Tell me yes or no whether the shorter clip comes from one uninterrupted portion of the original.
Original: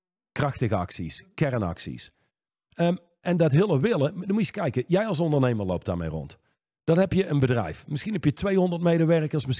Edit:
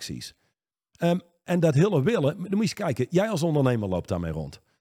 yes